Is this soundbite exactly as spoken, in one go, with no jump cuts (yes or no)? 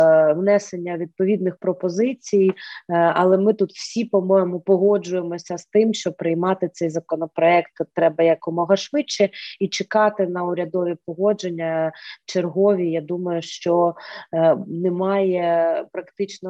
yes